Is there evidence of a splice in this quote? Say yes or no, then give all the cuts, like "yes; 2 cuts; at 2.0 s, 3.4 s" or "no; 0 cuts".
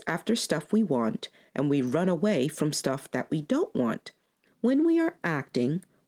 yes; 1 cut; at 4.4 s